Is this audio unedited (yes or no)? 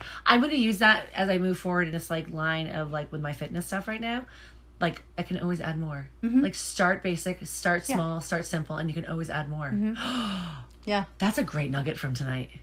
no